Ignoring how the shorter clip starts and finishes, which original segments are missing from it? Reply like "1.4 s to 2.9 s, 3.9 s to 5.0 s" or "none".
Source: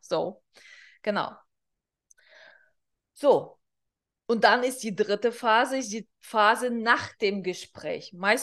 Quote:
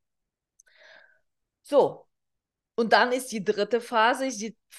none